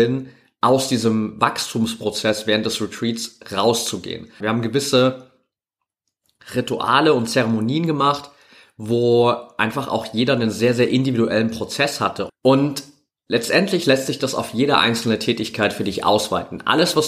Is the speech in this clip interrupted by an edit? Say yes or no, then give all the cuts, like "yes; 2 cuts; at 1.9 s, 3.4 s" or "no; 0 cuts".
yes; 2 cuts; at 4.4 s, 12.3 s